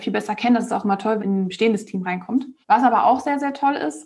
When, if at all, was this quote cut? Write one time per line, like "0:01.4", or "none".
0:01.2
0:02.6

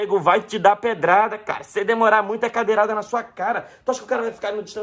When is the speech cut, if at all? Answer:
none

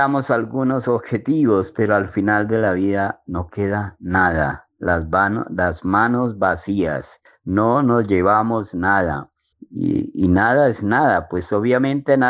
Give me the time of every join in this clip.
0:09.5

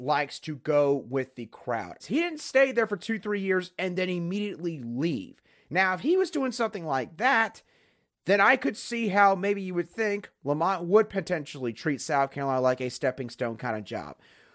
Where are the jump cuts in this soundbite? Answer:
0:02.0

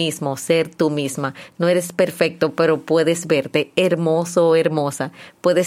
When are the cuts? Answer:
none

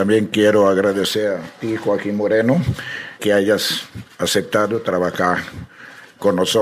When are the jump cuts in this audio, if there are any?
0:03.2

